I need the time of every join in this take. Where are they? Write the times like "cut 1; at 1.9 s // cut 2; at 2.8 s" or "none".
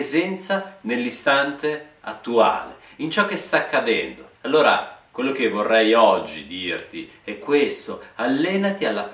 cut 1; at 4.4 s